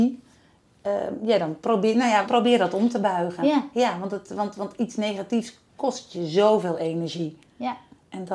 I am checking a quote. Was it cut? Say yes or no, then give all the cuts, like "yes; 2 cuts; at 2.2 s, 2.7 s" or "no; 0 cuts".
yes; 1 cut; at 2.3 s